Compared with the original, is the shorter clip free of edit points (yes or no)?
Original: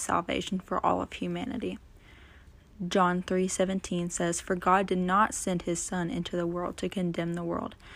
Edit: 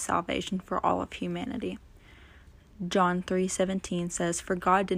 yes